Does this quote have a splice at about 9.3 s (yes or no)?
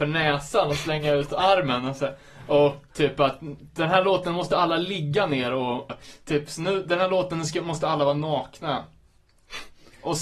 no